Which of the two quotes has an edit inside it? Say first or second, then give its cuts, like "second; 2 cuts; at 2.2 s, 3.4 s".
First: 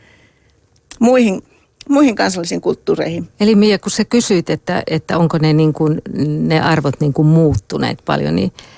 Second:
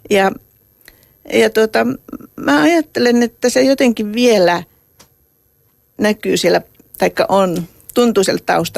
first; 1 cut; at 3.3 s